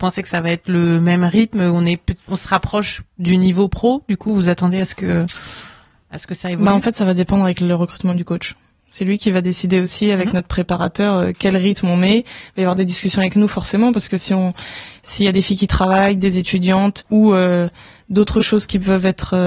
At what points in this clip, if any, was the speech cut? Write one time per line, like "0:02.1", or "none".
0:17.0